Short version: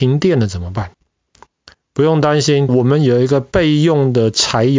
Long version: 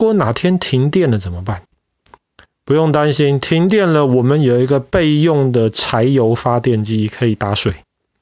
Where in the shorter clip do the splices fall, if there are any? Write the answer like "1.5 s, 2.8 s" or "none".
2.7 s